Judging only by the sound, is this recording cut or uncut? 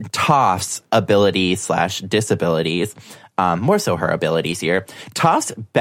uncut